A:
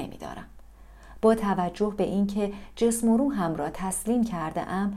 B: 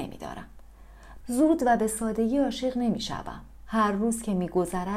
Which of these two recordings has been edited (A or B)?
B